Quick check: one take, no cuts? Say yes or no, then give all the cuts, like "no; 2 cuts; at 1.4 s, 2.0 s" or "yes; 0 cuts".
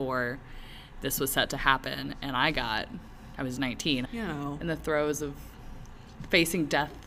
no; 1 cut; at 4.1 s